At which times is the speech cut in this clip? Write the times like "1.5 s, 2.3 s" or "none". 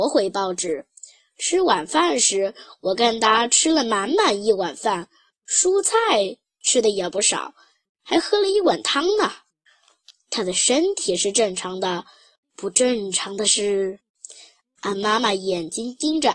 none